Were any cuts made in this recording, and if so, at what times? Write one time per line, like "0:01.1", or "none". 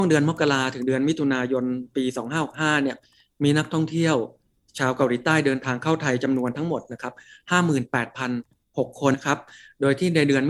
0:09.1